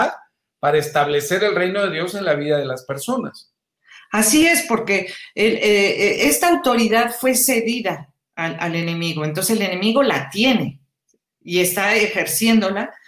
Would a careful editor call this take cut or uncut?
uncut